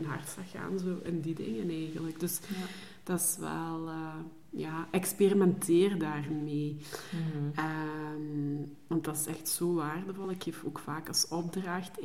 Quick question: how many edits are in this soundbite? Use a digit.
0